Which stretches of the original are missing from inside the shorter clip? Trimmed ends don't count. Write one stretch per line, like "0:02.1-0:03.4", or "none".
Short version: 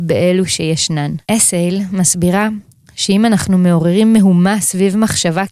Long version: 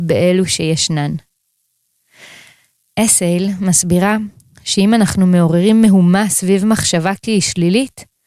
0:01.2-0:02.9